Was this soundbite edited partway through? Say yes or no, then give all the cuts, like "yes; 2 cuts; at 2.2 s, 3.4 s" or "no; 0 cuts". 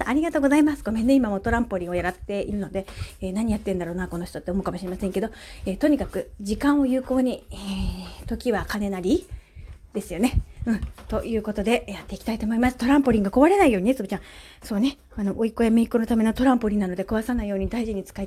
no; 0 cuts